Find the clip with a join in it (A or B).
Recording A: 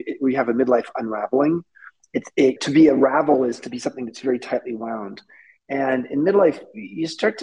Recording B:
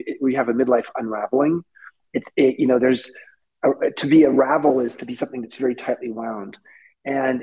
A